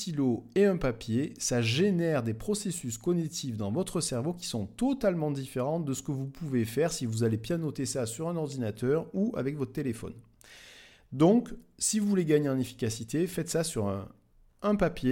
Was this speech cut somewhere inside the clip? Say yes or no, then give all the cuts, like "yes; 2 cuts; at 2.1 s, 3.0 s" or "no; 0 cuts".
no; 0 cuts